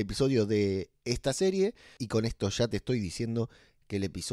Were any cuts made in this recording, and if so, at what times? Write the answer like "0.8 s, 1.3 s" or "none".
2.0 s